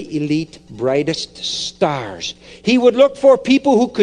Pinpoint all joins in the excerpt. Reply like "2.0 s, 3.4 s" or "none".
none